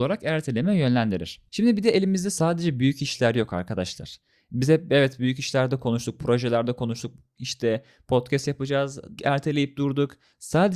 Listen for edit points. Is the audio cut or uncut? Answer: cut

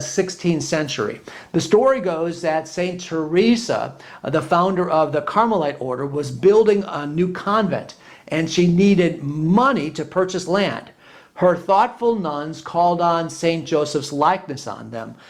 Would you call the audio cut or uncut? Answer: cut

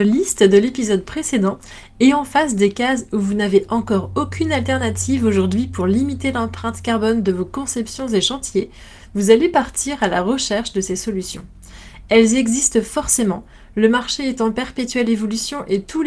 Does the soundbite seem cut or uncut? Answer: uncut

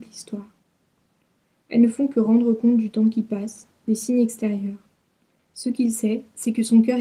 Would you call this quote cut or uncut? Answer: cut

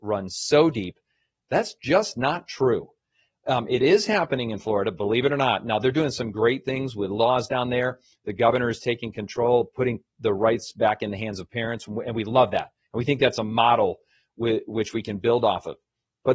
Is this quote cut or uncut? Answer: cut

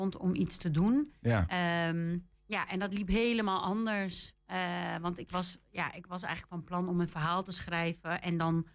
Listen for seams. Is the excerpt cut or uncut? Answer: cut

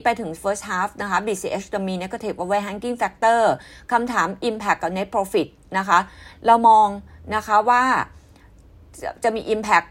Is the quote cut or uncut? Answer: uncut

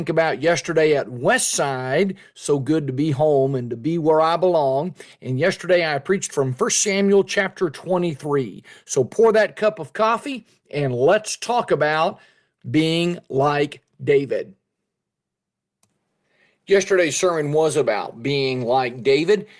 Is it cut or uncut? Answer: uncut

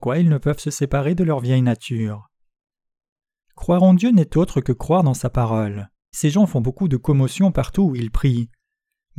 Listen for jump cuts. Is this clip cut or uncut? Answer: cut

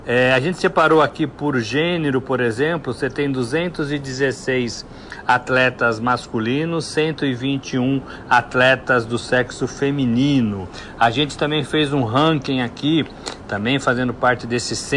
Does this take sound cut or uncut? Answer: uncut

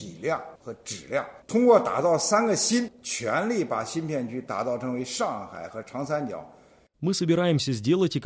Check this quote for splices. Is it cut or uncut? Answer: uncut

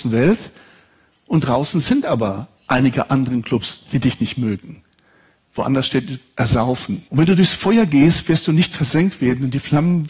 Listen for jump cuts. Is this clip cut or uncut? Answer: cut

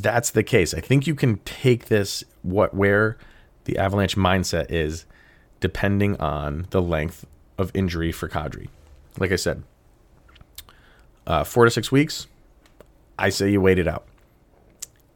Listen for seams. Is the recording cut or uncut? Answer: uncut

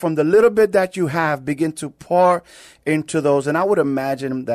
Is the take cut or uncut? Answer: uncut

